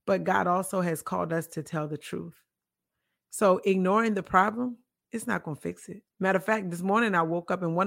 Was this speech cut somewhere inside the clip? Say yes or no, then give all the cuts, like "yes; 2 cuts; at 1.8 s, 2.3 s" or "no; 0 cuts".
yes; 1 cut; at 6.1 s